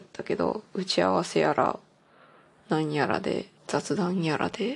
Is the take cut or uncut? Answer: cut